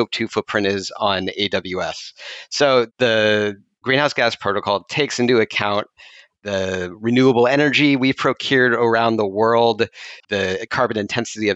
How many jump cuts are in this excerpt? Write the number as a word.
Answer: one